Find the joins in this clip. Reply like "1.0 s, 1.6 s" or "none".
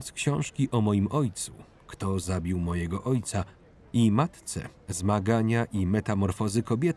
none